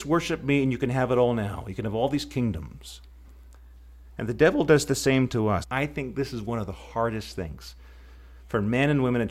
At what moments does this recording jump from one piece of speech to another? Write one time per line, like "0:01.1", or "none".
0:05.6